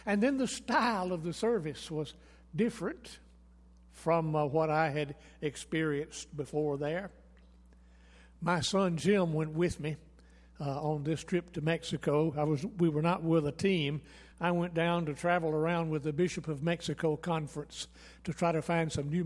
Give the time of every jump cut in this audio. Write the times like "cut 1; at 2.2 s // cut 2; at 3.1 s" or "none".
none